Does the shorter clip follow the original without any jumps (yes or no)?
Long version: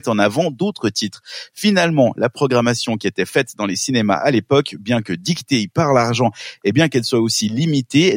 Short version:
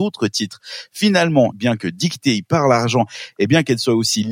no